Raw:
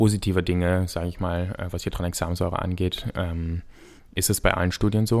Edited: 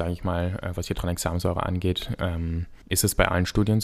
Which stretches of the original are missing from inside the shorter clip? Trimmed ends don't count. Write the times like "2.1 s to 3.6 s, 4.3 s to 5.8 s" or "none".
3.8 s to 4.1 s